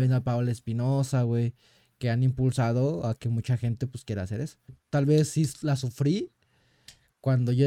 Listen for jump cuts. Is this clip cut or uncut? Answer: cut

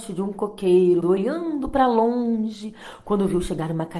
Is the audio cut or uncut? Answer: cut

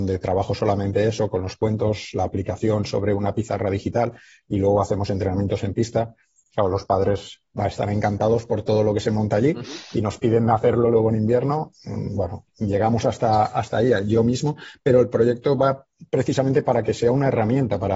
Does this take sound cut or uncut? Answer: uncut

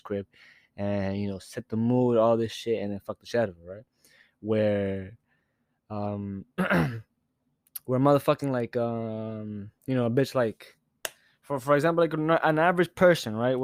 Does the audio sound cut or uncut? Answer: uncut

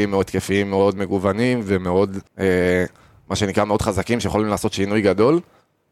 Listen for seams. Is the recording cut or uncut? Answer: cut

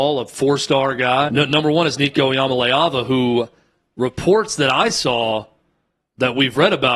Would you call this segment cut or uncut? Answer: cut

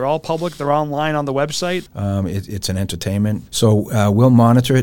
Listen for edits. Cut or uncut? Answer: cut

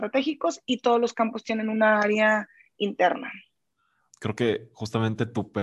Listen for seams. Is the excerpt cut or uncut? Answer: cut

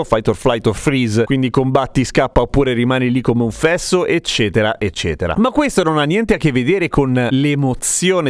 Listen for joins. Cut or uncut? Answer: uncut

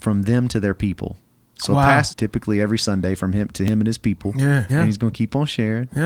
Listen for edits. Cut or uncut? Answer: cut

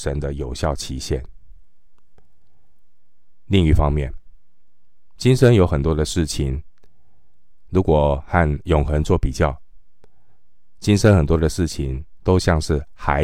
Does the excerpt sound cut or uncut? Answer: uncut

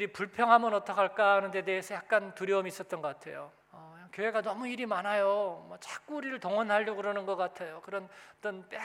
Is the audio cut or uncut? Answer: cut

